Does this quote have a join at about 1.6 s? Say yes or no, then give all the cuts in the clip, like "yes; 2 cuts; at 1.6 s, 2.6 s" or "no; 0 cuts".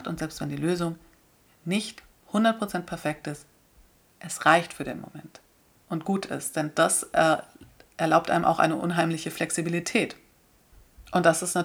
no; 0 cuts